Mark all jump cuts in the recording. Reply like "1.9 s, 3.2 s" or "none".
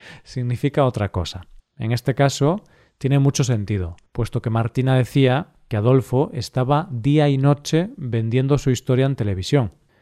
1.6 s, 4.1 s